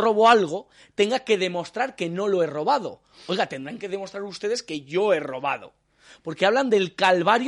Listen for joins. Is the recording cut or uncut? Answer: uncut